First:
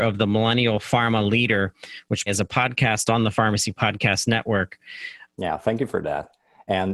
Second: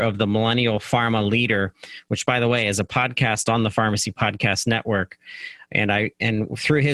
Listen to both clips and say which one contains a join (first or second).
first